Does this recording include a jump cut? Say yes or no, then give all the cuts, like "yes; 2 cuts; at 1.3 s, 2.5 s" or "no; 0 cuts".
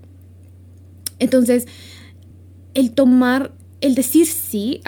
no; 0 cuts